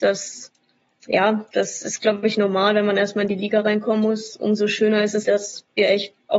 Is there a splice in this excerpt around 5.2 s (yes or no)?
yes